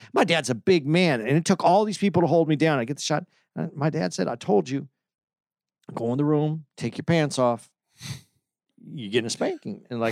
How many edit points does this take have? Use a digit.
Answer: 0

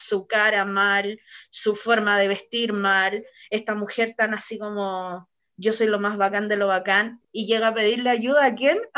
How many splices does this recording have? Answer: 1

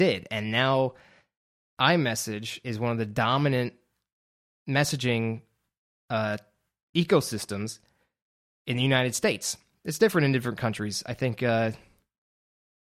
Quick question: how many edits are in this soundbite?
1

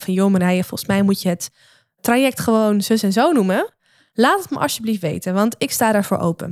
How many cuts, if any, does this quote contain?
0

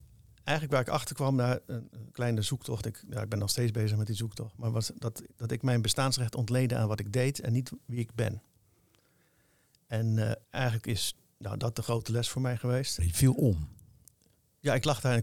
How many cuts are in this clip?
2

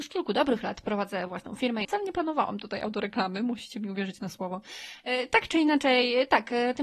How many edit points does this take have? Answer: 1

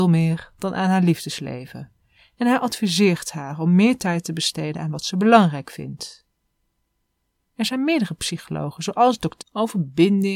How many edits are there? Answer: 1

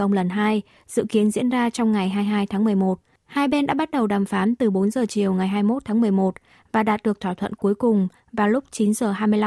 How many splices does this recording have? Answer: 1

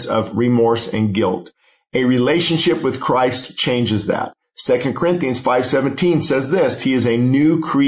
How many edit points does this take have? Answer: 1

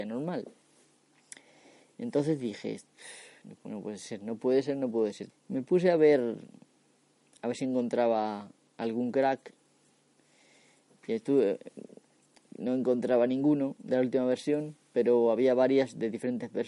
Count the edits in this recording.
1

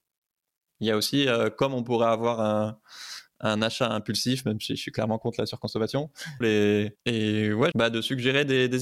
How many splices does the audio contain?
2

